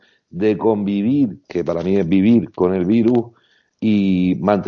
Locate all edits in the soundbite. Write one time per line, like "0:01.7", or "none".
0:01.4

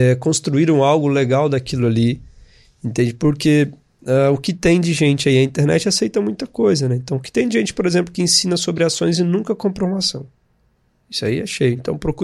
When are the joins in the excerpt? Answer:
none

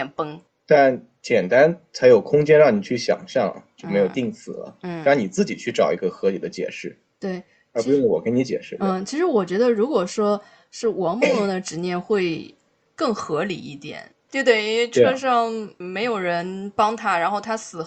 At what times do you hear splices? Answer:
0:14.3

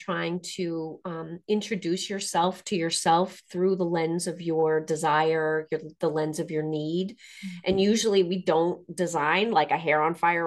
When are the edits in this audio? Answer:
none

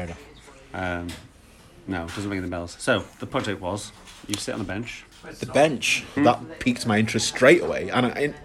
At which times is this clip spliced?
0:06.2

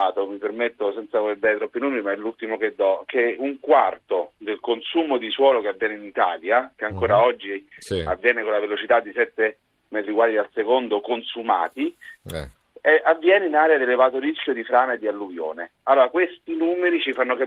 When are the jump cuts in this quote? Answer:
0:15.7

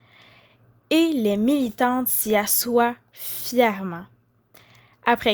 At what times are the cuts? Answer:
none

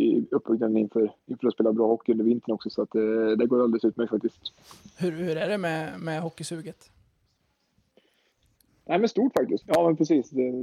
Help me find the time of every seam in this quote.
0:09.6

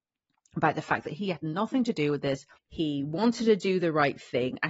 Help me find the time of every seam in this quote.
0:02.6

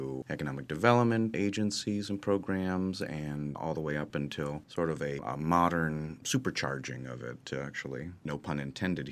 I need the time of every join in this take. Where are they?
none

